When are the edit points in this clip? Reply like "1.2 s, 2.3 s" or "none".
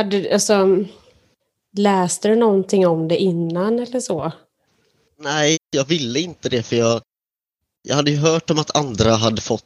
5.5 s